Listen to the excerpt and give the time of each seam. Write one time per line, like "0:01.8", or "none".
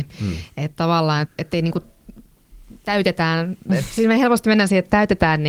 0:01.2